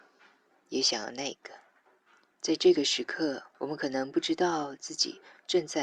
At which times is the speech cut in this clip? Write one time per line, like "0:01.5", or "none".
0:02.3
0:03.5